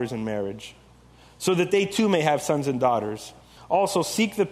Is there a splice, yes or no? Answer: yes